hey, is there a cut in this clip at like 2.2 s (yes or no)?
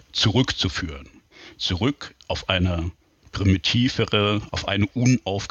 yes